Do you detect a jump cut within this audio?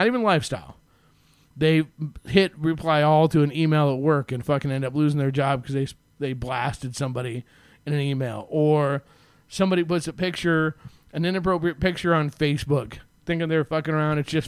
no; 0 cuts

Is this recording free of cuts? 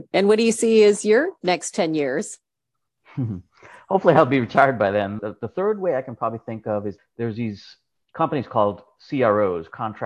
no; 2 cuts; at 5.2 s, 7.0 s

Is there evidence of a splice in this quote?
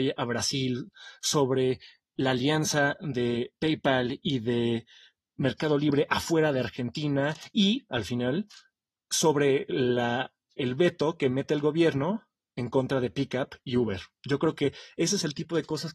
no; 0 cuts

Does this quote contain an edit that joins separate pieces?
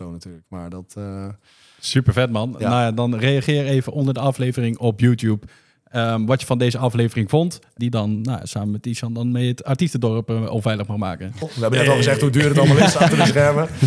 yes; 2 cuts; at 7.8 s, 11.4 s

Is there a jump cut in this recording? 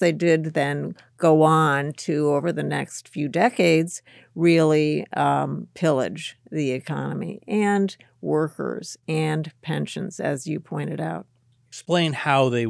no; 0 cuts

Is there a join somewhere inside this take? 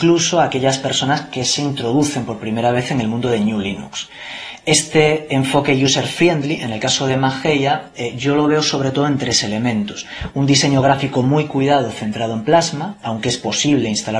no; 0 cuts

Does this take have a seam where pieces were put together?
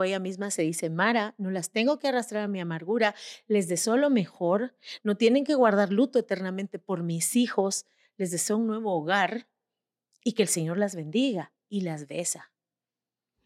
no; 0 cuts

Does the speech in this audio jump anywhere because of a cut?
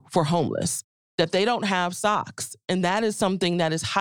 no; 0 cuts

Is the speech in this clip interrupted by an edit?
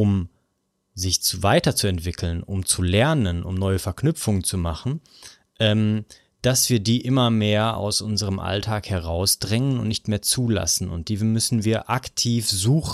no; 0 cuts

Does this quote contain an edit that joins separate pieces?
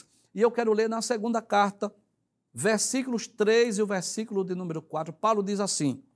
yes; 1 cut; at 2.5 s

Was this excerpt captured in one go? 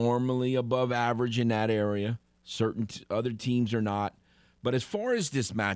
yes; 0 cuts

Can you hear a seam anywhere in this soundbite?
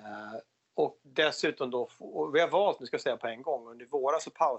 yes; 1 cut; at 1.0 s

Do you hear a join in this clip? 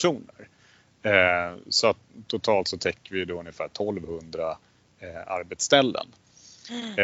no; 0 cuts

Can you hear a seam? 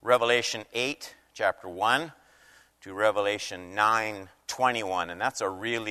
no; 0 cuts

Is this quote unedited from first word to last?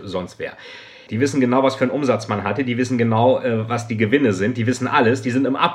no; 1 cut; at 1.1 s

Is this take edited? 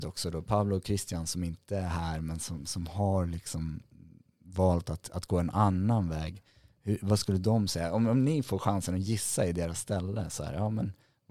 no; 0 cuts

